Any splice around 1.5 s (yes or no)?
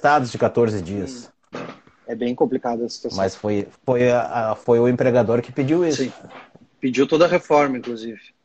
yes